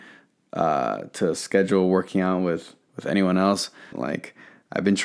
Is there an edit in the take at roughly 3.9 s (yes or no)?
yes